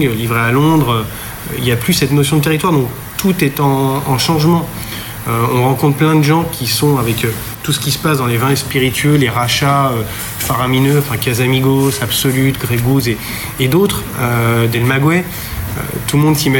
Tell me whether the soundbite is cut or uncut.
uncut